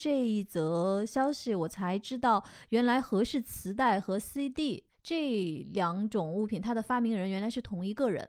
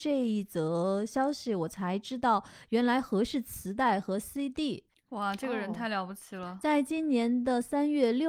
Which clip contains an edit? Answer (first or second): second